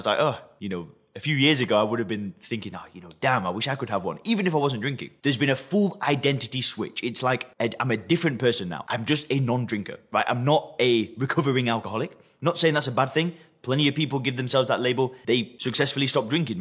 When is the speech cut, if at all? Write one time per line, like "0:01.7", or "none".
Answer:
0:05.2